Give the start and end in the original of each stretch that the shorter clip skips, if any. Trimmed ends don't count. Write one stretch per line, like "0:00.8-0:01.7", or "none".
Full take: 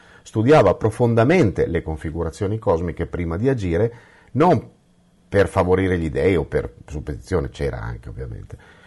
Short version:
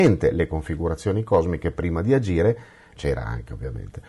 0:04.3-0:07.5